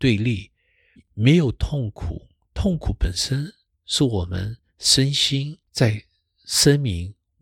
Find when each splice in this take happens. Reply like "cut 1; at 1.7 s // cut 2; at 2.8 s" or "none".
cut 1; at 0.9 s // cut 2; at 5.6 s